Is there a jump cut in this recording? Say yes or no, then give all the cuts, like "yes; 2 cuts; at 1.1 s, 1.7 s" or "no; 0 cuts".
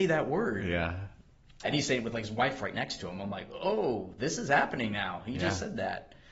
yes; 1 cut; at 1.6 s